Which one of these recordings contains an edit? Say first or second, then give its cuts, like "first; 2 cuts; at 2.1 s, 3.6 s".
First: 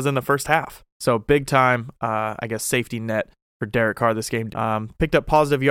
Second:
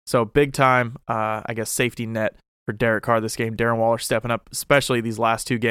first; 2 cuts; at 0.9 s, 4.5 s